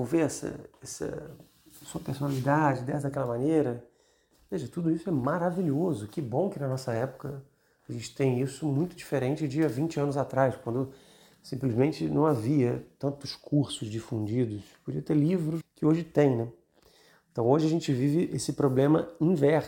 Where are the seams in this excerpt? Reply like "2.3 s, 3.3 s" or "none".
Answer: 15.6 s